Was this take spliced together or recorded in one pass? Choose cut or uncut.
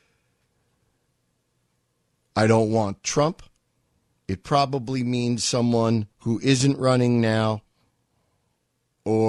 cut